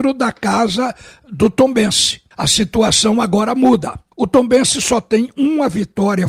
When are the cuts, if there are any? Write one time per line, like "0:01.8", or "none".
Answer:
0:02.3
0:04.1